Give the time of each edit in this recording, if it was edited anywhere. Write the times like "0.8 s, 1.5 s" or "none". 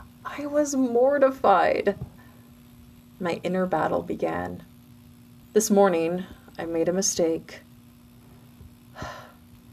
5.4 s